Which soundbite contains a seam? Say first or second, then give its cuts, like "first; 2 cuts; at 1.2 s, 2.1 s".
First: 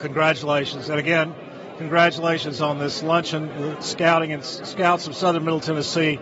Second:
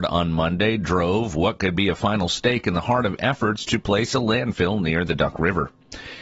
first; 1 cut; at 3.5 s